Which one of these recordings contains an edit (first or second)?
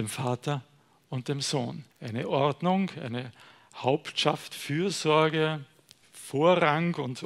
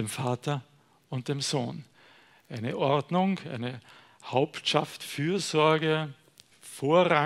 first